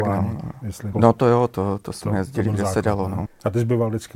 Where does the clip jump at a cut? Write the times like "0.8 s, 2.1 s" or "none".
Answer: 0.9 s, 3.3 s